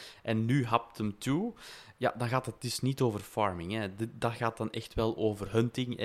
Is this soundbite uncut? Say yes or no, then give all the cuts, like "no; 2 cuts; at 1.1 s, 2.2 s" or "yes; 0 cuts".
yes; 0 cuts